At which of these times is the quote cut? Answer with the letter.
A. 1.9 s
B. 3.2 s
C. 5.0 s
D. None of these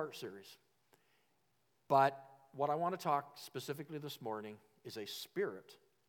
A